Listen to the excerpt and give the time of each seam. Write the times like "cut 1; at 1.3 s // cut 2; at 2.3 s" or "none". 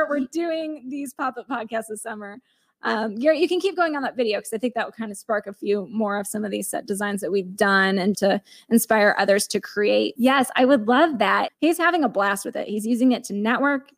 cut 1; at 8.1 s // cut 2; at 10.2 s // cut 3; at 11.5 s